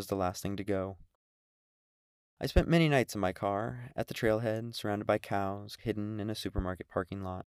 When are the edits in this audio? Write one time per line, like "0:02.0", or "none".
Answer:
0:05.8

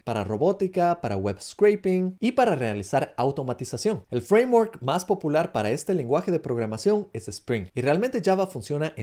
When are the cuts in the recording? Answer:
0:04.1

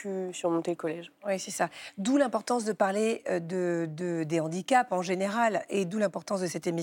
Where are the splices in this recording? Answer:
none

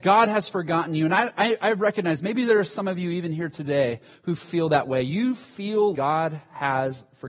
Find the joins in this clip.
0:05.9

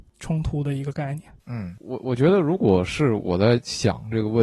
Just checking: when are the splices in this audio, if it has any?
none

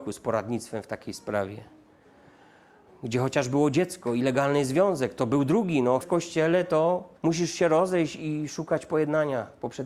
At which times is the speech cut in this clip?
0:06.0
0:07.2

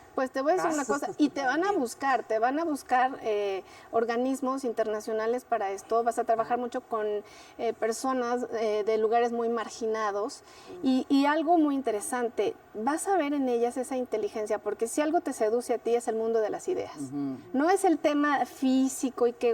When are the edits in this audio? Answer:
0:06.8

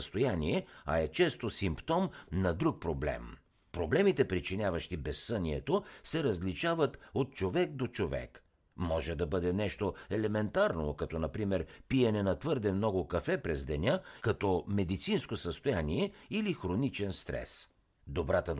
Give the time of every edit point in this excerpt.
0:14.2

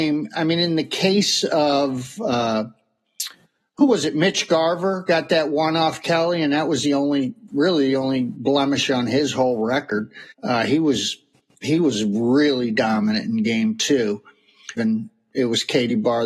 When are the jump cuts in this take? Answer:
0:10.3
0:14.8

